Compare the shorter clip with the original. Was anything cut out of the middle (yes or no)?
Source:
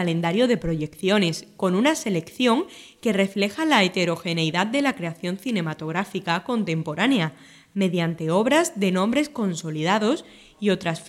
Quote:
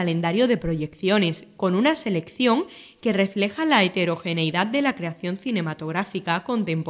no